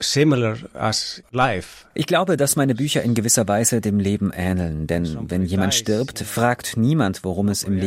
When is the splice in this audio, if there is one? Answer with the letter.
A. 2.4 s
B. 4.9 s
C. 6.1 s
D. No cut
D